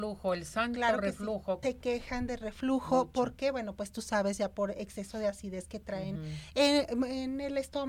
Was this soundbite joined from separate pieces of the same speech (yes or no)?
yes